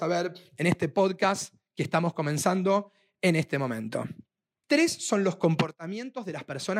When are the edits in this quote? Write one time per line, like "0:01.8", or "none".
0:04.6